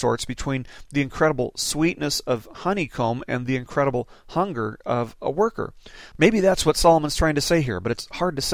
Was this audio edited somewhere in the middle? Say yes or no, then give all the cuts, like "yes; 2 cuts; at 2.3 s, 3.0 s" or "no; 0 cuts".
yes; 1 cut; at 6.1 s